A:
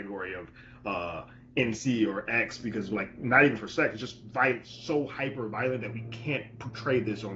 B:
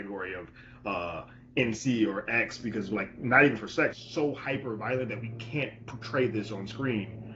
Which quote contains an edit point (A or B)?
B